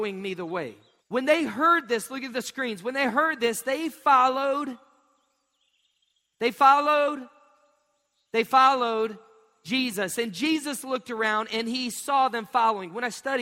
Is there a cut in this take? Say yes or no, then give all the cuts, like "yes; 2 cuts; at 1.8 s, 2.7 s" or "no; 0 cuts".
yes; 1 cut; at 1.0 s